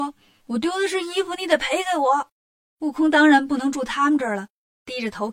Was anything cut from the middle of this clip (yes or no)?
no